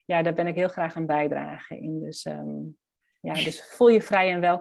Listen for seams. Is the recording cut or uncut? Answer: uncut